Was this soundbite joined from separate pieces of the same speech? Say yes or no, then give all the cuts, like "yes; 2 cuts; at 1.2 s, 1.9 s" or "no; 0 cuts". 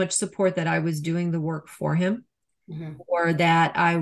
no; 0 cuts